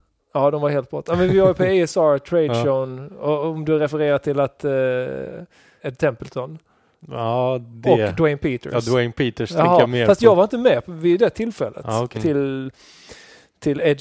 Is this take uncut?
no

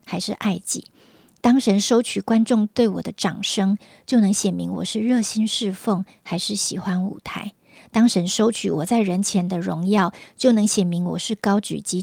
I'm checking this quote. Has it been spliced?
no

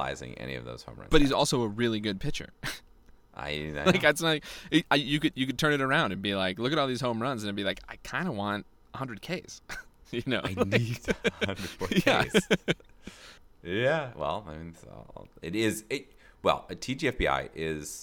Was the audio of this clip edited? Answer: no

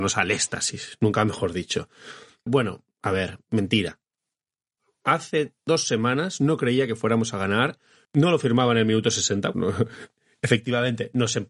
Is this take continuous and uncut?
no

